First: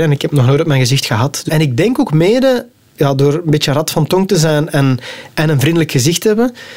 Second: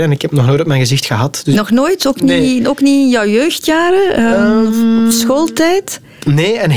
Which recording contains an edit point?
first; 1 cut; at 1.5 s

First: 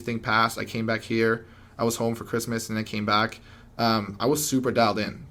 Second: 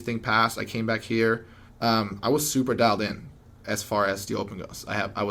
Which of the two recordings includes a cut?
second; 1 cut; at 1.7 s

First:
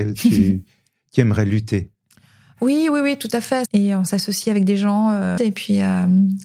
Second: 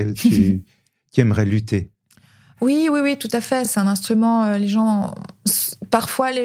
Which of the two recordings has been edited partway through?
first; 2 cuts; at 3.7 s, 5.4 s

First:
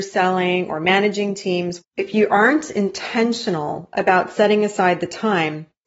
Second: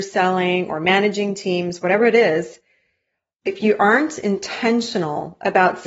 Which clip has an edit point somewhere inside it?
first; 1 cut; at 1.8 s

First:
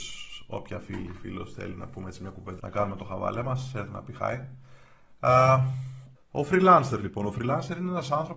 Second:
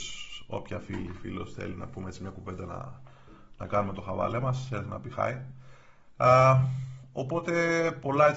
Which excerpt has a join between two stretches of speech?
first; 2 cuts; at 2.6 s, 6.1 s

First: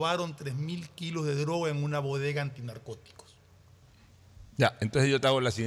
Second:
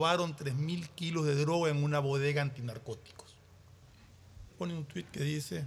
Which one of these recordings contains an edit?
second; 1 cut; at 4.5 s

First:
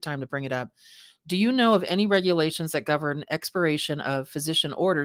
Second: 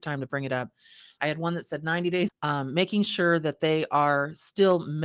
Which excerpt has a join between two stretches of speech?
second; 2 cuts; at 1.2 s, 2.3 s

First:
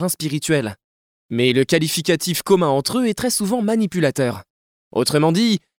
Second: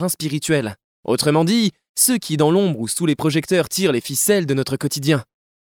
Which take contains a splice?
second; 1 cut; at 1.0 s

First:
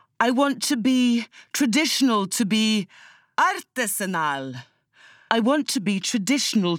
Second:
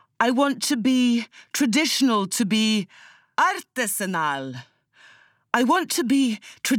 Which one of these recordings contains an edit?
first; 1 cut; at 5.3 s

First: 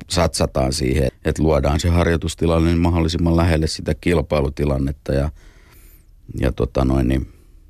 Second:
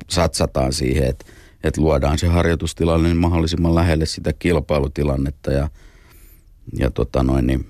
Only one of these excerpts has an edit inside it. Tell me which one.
first; 1 cut; at 1.1 s

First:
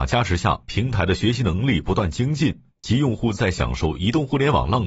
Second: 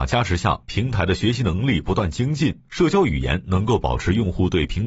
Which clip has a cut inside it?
second; 1 cut; at 2.7 s

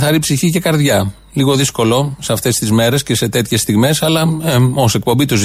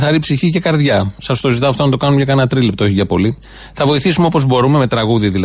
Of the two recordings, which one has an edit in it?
second; 1 cut; at 1.2 s

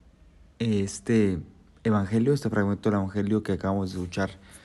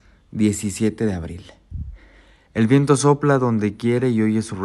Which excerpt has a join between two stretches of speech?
second; 1 cut; at 2.5 s

